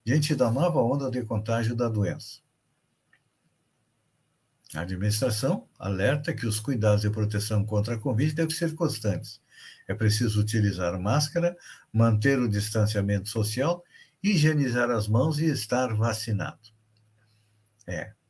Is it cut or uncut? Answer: uncut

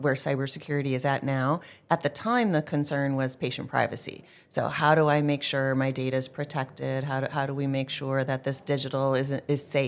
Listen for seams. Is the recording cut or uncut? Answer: uncut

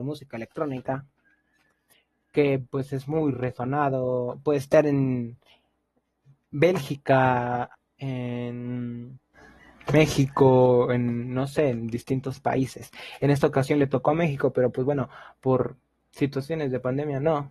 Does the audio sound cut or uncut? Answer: uncut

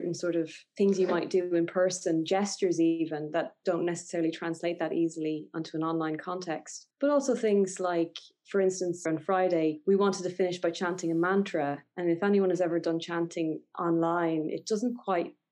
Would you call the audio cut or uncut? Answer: uncut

